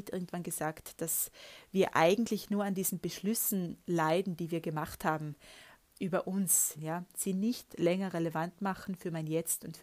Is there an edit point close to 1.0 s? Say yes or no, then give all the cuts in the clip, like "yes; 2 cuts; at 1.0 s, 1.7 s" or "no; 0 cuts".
no; 1 cut; at 6.8 s